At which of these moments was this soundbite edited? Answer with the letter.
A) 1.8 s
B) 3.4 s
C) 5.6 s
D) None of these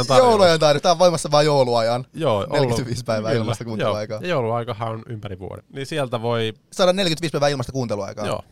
C